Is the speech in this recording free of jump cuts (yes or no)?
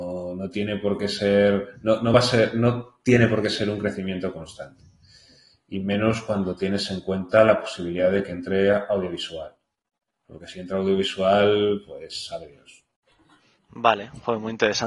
yes